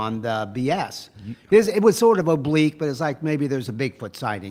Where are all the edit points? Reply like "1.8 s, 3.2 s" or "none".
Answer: none